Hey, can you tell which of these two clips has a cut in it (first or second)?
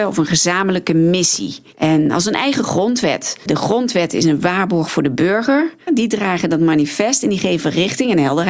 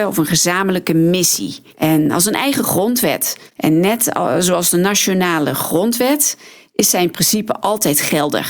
first